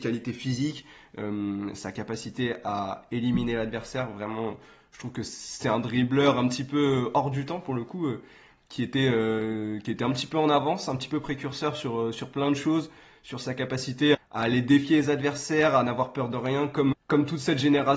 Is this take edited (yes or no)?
yes